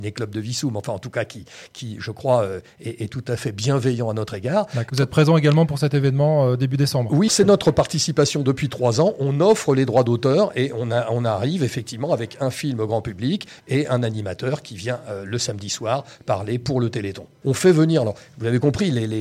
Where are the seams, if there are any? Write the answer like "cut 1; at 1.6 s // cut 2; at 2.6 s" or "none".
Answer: cut 1; at 4.9 s // cut 2; at 7.3 s // cut 3; at 17.4 s